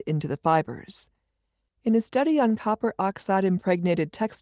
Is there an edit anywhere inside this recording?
yes; 1 cut; at 1.7 s

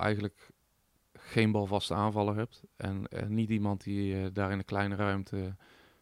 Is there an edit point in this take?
no; 0 cuts

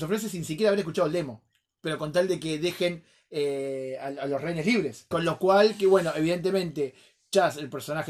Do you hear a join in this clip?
yes; 1 cut; at 5.1 s

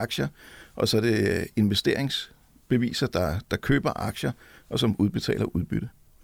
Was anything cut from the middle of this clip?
no; 0 cuts

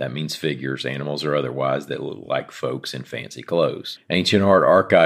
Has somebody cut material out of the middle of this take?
no; 0 cuts

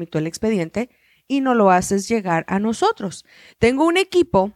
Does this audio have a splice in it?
no; 0 cuts

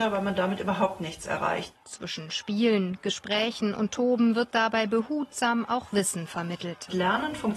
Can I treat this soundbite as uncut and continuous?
no; 1 cut; at 1.7 s

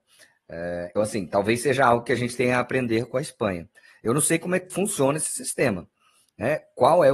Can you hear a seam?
yes; 1 cut; at 0.9 s

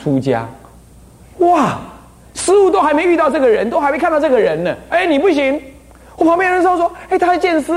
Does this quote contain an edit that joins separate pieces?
yes; 1 cut; at 4.9 s

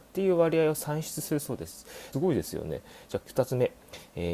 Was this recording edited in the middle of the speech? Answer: yes; 2 cuts; at 2.1 s, 3.2 s

